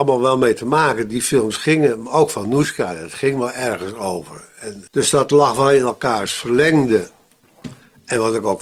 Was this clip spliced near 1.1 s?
no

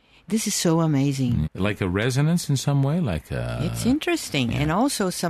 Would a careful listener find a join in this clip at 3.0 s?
no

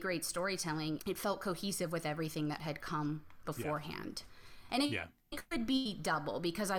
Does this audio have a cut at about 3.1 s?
no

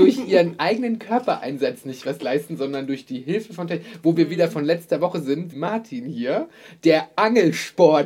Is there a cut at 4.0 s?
no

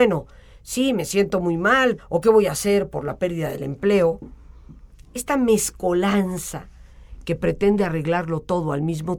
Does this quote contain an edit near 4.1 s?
no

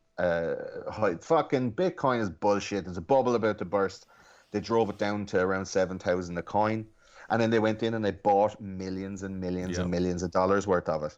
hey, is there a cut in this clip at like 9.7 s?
no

